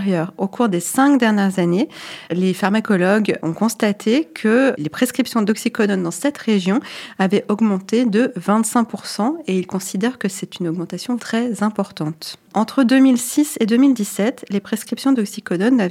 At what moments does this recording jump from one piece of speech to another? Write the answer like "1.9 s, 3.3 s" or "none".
11.2 s, 12.5 s